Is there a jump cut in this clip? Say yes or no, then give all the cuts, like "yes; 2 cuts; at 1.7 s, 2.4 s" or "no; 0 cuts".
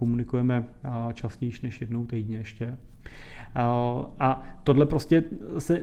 no; 0 cuts